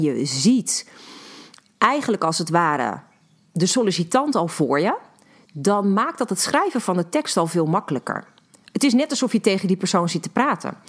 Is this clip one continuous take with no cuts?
yes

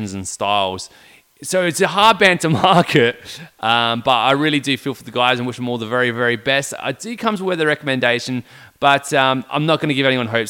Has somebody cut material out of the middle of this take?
no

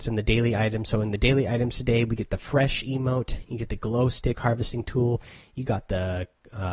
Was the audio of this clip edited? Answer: no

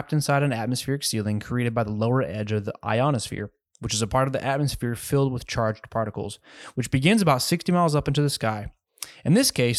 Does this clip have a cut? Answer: no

